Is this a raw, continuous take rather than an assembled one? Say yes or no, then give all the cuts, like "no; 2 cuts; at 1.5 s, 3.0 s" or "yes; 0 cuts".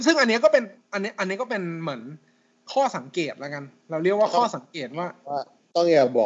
yes; 0 cuts